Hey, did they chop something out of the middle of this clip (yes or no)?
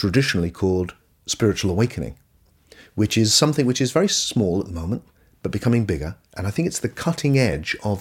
yes